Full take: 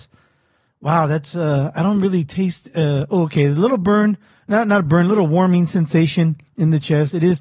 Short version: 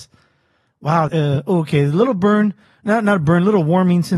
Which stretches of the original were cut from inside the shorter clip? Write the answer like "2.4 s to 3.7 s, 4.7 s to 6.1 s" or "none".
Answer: 1.1 s to 2.7 s